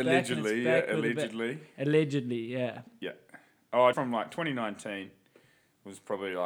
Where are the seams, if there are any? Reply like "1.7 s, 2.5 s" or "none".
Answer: 2.9 s, 3.9 s

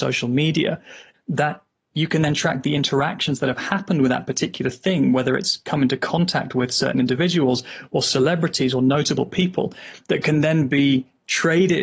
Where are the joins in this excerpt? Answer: 1.1 s

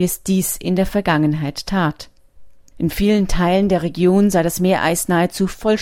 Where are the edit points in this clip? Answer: 2.7 s

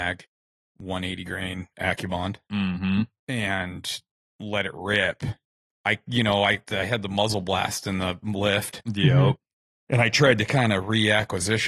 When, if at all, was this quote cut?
5.7 s

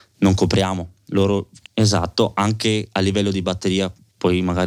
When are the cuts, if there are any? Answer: 1.7 s

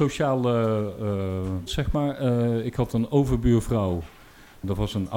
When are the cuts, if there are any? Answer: 1.7 s

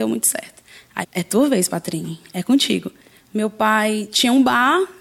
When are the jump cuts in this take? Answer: 1.0 s, 3.2 s

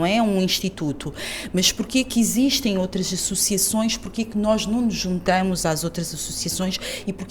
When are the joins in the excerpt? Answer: none

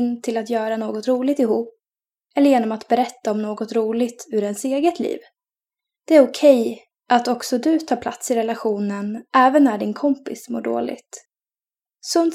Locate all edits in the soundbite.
none

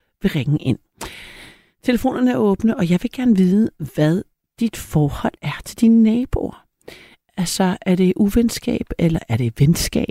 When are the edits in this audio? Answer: none

